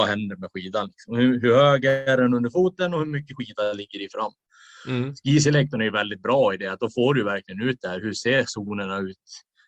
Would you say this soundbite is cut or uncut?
uncut